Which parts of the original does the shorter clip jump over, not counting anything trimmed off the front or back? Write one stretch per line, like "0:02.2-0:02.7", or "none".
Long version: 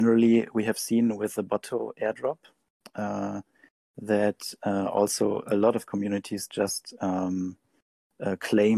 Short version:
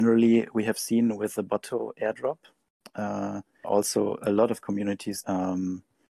0:03.6-0:04.9
0:06.5-0:07.0